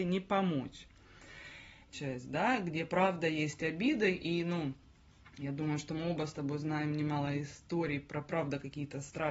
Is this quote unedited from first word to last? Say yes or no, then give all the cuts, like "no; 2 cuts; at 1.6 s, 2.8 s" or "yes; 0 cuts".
no; 1 cut; at 1.9 s